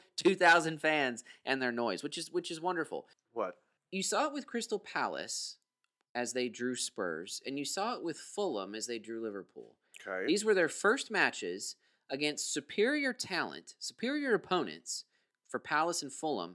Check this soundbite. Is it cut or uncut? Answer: cut